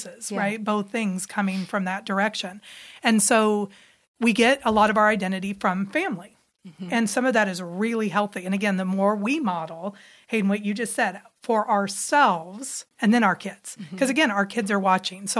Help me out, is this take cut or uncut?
cut